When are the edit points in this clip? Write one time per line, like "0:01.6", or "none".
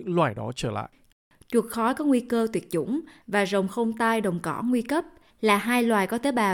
none